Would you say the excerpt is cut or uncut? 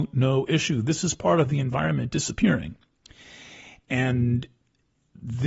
uncut